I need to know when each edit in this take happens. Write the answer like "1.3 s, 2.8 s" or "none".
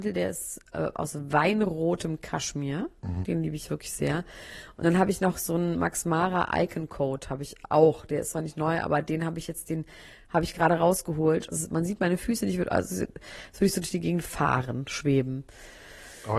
3.2 s, 11.5 s